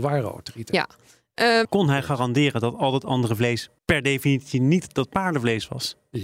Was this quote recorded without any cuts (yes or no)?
no